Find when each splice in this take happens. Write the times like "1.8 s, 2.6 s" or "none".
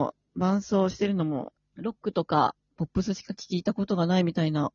1.5 s